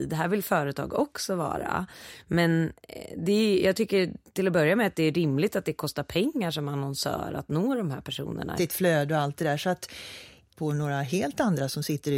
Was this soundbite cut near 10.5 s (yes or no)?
yes